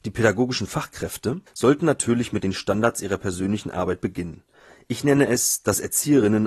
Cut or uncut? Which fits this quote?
cut